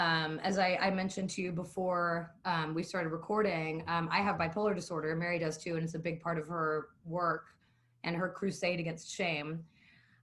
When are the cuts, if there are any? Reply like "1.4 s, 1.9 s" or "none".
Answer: none